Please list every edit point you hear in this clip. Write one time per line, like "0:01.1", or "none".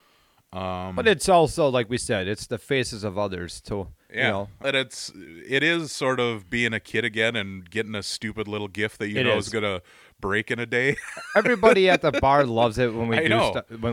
0:04.6